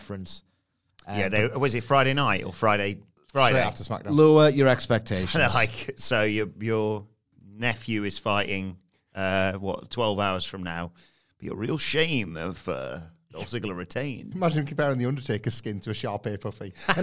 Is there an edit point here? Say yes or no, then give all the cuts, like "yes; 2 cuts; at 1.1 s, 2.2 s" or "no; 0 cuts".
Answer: yes; 1 cut; at 14.3 s